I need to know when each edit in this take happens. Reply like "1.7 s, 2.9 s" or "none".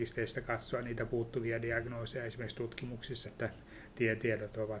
3.3 s